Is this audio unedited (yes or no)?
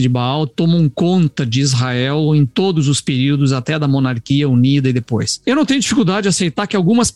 no